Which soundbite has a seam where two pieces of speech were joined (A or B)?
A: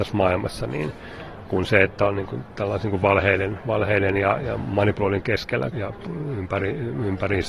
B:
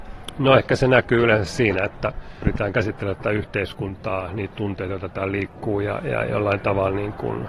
A